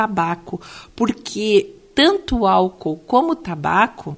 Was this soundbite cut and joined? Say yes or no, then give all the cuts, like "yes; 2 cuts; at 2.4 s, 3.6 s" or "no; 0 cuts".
no; 0 cuts